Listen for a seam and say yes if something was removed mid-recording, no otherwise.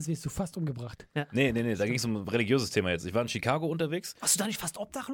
no